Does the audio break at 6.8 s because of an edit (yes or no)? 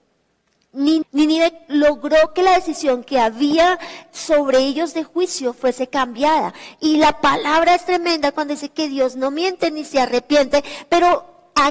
no